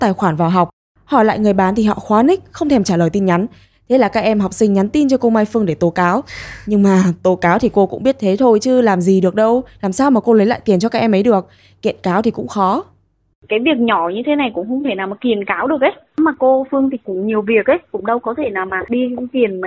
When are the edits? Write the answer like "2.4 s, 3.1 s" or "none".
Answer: none